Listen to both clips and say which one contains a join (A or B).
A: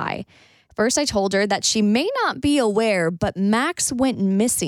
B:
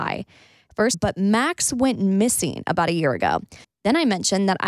B